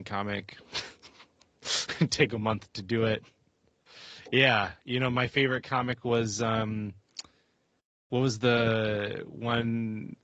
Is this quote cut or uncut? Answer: uncut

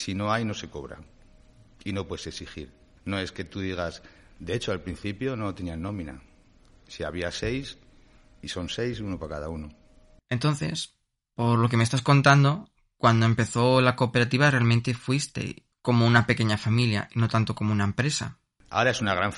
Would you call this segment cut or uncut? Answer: cut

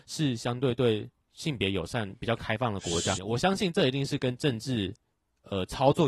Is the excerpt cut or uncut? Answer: cut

